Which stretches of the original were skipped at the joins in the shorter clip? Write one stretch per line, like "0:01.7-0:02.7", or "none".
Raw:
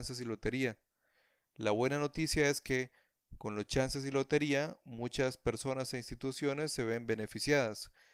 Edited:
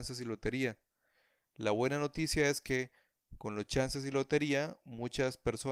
none

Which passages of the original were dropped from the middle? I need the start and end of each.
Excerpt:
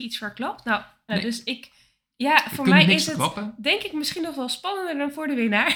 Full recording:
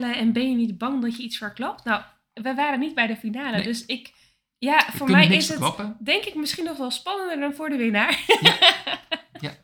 0:02.3-0:03.5

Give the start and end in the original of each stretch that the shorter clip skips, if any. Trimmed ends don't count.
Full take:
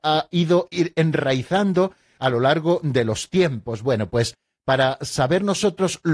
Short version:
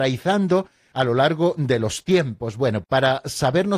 0:04.1-0:04.6

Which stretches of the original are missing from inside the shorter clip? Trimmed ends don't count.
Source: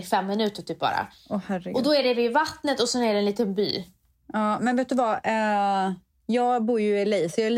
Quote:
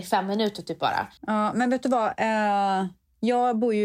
0:01.2-0:04.2

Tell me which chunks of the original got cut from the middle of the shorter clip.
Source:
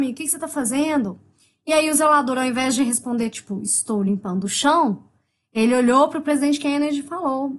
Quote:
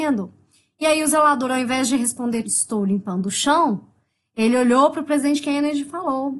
0:03.3-0:03.6

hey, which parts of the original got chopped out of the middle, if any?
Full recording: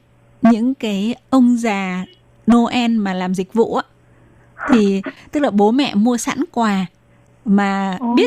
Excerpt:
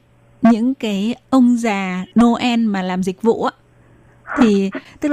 0:02.1-0:02.4

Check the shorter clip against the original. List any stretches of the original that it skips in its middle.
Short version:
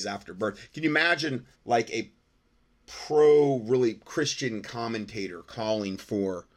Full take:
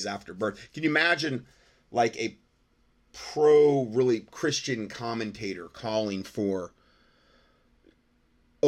0:01.5-0:01.8

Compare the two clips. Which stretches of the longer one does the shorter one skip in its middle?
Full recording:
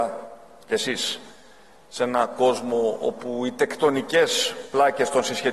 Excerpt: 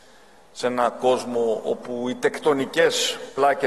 none

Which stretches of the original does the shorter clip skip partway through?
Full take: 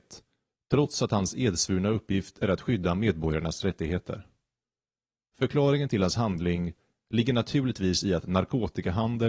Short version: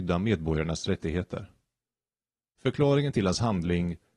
none

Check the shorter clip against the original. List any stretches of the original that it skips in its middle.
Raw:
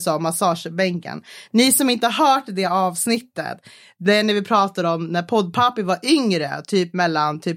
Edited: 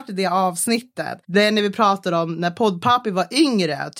0:03.6-0:03.9

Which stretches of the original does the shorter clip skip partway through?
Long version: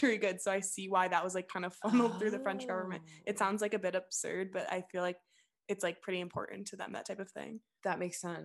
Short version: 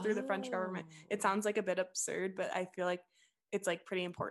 none

